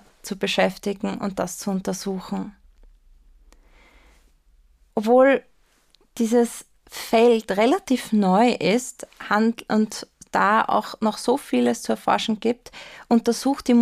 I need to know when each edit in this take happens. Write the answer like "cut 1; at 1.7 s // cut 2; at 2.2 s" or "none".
cut 1; at 4.9 s